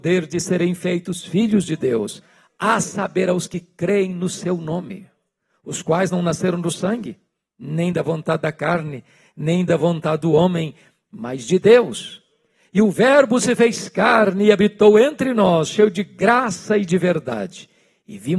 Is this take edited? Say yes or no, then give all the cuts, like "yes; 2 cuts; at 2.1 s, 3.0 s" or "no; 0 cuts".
no; 0 cuts